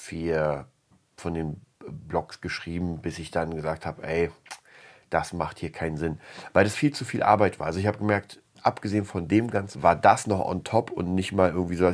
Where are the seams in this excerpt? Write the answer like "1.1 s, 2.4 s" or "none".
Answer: 6.7 s, 9.7 s